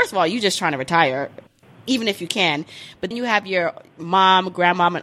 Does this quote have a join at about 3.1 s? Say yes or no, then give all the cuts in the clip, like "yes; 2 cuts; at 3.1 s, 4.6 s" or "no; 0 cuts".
yes; 1 cut; at 3.1 s